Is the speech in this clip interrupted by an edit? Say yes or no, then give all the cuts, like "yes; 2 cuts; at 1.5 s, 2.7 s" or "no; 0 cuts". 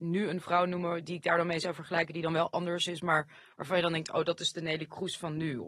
no; 0 cuts